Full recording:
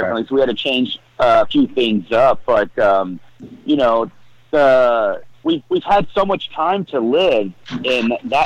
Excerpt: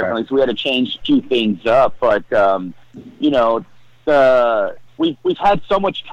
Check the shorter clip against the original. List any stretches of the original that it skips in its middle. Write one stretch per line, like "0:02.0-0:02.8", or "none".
0:01.0-0:01.5